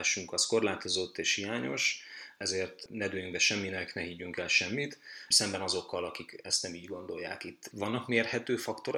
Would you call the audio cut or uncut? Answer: uncut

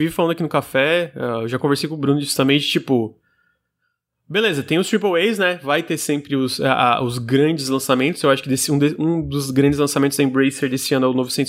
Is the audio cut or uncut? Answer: uncut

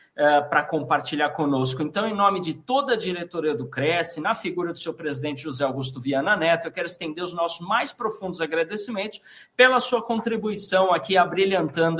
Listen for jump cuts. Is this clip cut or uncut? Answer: uncut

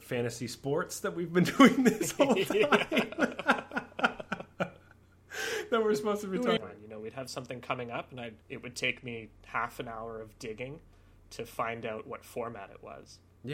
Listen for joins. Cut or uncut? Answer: cut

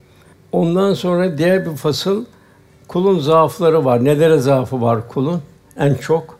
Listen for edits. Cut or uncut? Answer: uncut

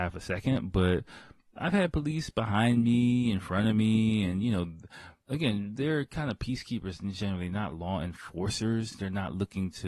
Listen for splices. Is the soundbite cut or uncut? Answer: uncut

